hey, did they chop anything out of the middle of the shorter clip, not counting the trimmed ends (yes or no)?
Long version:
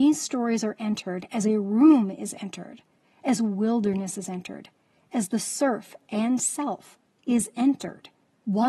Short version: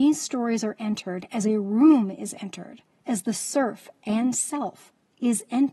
yes